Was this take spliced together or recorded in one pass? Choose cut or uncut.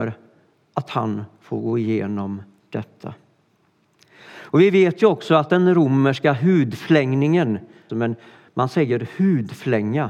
cut